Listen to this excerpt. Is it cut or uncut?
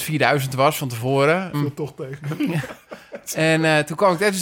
cut